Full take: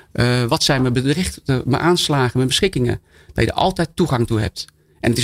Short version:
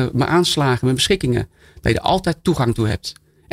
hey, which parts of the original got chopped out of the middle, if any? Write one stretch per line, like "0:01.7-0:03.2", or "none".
none